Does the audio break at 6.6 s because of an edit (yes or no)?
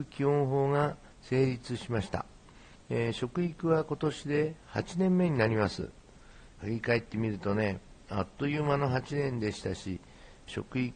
yes